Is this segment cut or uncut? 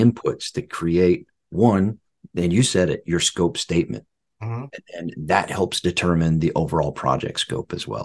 uncut